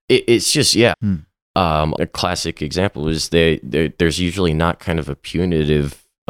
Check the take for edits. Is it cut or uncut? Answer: cut